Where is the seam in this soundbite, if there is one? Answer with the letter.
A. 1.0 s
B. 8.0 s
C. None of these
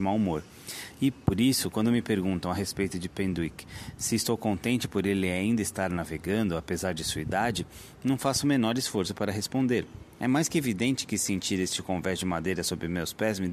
C